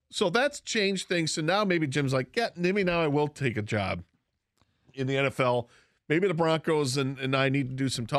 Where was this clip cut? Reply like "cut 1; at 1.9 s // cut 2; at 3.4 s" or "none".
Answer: none